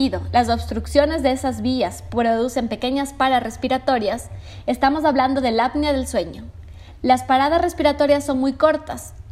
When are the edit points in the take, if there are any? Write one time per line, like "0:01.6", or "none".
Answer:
none